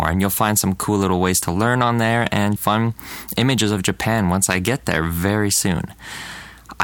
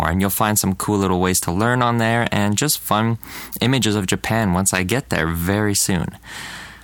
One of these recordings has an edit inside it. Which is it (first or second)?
first